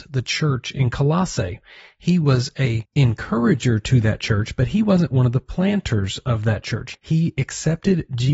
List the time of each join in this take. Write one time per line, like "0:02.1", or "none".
0:06.9

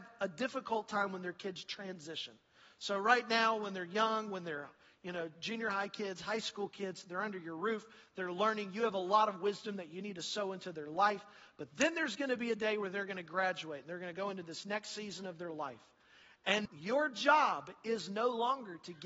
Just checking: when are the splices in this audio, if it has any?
0:16.7

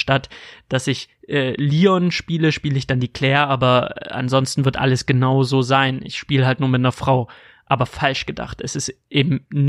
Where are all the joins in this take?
none

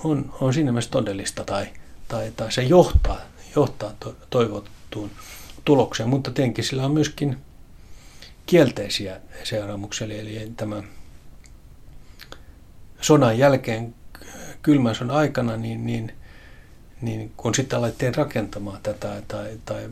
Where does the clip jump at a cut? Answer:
none

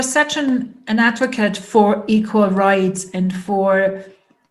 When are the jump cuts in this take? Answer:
none

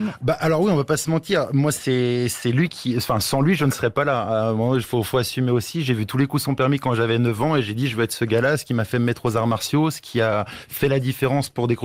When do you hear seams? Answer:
none

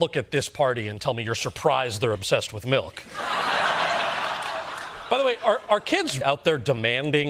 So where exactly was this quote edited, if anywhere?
0:06.2

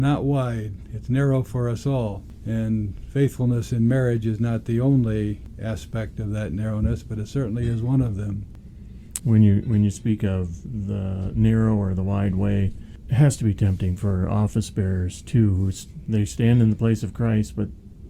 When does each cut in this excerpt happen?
0:09.2

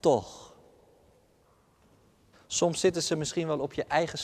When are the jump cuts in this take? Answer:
0:02.3

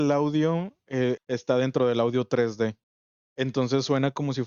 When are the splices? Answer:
0:01.2

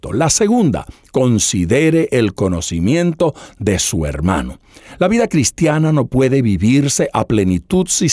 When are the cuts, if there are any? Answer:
none

